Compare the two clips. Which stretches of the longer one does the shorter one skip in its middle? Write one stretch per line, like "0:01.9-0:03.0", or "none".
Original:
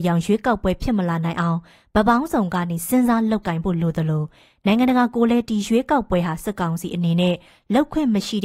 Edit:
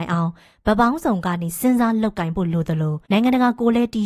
0:04.3-0:04.6